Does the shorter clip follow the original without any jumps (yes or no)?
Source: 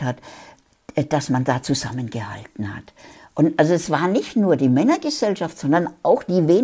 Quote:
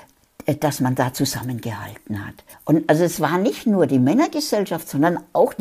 no